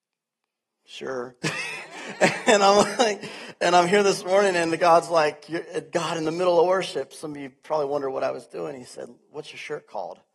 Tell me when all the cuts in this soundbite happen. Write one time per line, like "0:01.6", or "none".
none